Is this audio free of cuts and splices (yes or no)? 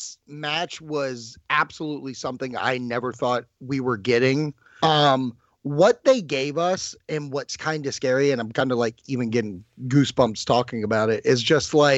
no